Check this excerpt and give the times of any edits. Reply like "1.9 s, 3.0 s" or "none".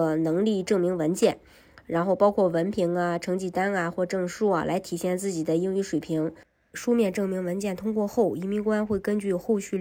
6.7 s